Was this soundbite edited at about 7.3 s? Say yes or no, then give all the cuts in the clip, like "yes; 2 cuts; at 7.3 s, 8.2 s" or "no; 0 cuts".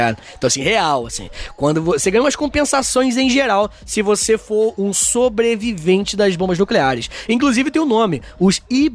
no; 0 cuts